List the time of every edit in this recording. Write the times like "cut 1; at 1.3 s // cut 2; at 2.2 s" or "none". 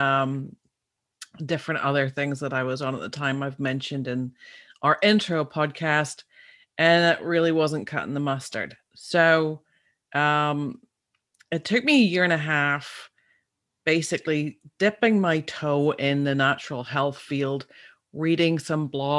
none

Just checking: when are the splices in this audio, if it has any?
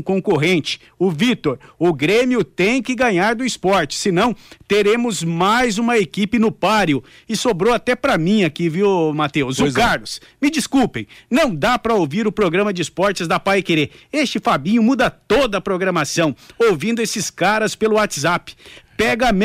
none

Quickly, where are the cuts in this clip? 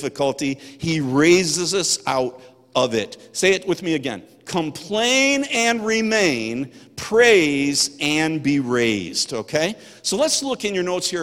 none

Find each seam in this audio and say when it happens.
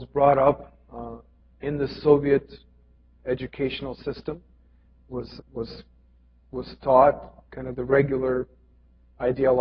cut 1; at 5.4 s

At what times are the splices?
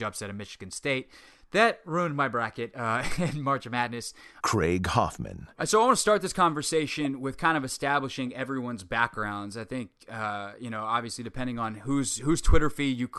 cut 1; at 4.4 s // cut 2; at 10.0 s

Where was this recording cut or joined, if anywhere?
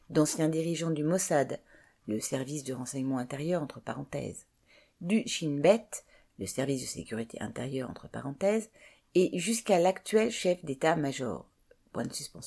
none

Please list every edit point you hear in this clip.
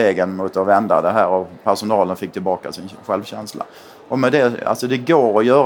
none

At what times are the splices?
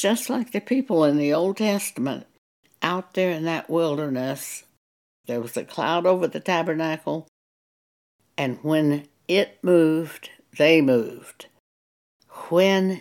cut 1; at 5.2 s

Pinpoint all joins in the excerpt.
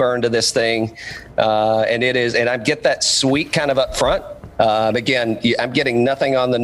cut 1; at 4.5 s

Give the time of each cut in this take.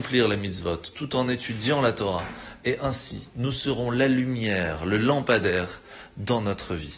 none

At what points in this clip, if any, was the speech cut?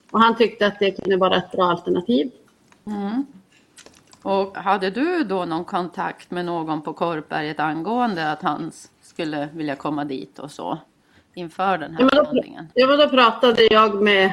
cut 1; at 4.5 s // cut 2; at 12.7 s

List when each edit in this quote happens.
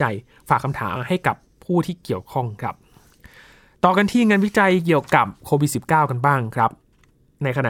cut 1; at 1.0 s

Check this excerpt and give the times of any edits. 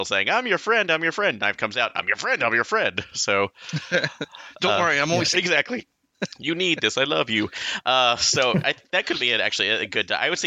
cut 1; at 5.3 s

